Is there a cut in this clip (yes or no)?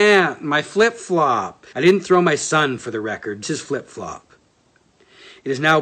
yes